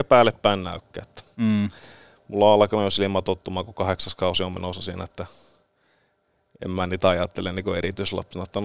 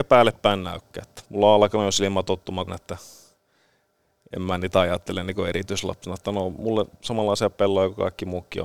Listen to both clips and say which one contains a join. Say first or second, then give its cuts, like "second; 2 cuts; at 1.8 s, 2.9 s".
second; 2 cuts; at 1.3 s, 2.7 s